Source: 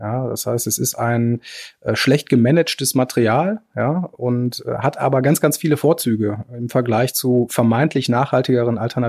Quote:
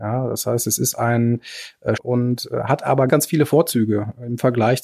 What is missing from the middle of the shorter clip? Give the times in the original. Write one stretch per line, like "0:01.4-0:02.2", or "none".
0:02.0-0:04.1
0:05.2-0:05.4